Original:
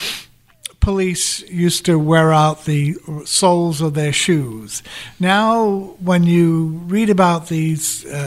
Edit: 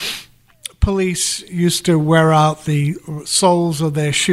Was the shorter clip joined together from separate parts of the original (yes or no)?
no